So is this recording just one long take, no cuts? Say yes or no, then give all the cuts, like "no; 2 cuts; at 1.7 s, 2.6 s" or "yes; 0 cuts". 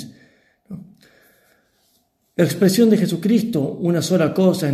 yes; 0 cuts